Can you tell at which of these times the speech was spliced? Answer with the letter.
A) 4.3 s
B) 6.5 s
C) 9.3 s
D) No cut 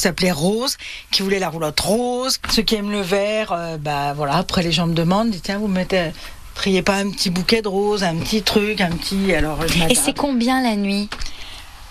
D